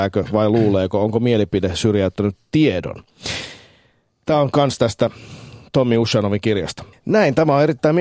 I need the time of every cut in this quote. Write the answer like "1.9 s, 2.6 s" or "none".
6.9 s